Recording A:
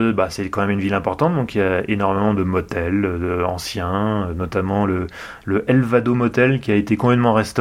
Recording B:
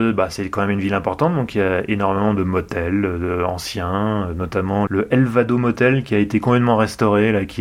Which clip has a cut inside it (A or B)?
B